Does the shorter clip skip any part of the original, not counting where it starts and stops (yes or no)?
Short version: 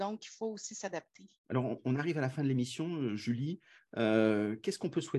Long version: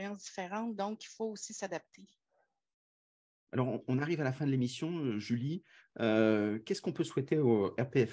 yes